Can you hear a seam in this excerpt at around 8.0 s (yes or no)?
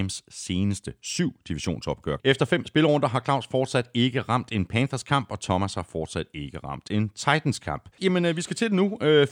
yes